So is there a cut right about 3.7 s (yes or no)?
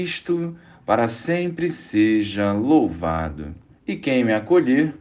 yes